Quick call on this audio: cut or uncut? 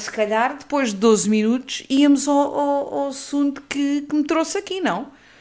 uncut